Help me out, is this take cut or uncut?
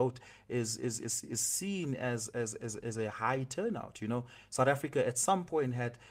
cut